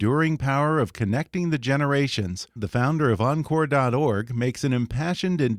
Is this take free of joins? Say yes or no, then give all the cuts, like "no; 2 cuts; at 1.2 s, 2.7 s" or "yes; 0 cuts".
no; 1 cut; at 2.6 s